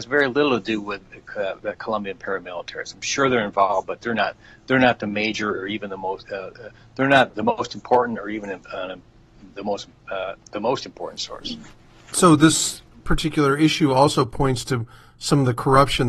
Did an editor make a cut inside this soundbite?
no; 0 cuts

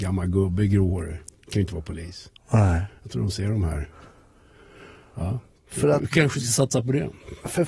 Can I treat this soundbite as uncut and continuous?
no; 1 cut; at 5.5 s

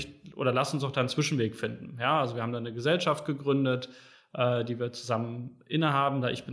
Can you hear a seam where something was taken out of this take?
no; 0 cuts

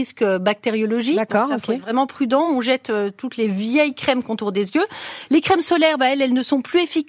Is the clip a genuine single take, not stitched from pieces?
yes; 0 cuts

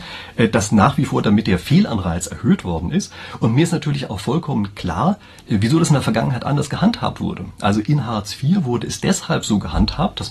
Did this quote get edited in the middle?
no; 0 cuts

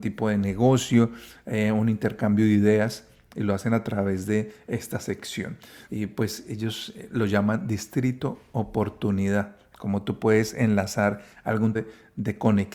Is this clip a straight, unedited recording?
no; 2 cuts; at 5.9 s, 11.7 s

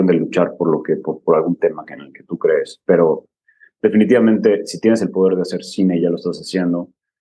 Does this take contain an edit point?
no; 0 cuts

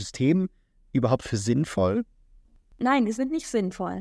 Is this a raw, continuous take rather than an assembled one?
yes; 0 cuts

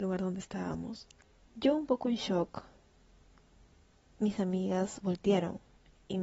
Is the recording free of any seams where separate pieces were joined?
no; 1 cut; at 1.5 s

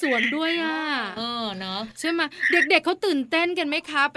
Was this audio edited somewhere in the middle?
no; 0 cuts

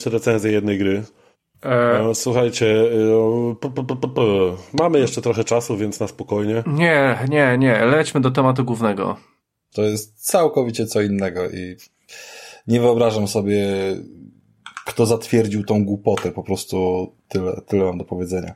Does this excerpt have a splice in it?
yes; 1 cut; at 9.7 s

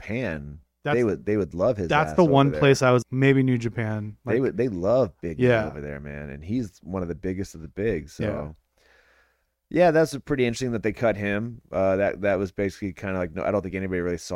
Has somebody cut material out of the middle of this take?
yes; 1 cut; at 3.0 s

